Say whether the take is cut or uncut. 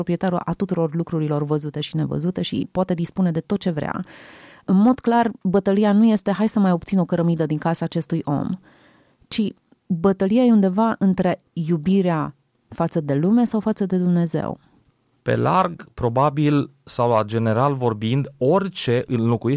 cut